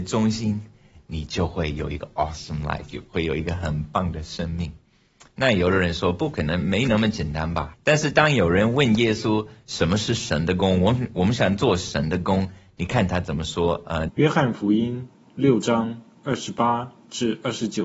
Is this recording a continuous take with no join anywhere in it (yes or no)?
no